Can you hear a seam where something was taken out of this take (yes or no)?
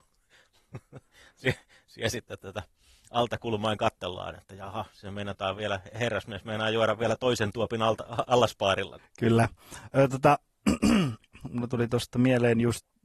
yes